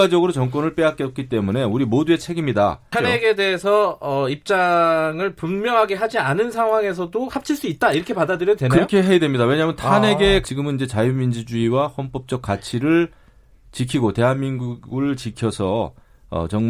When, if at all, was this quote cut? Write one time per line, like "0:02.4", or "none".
0:02.9
0:10.4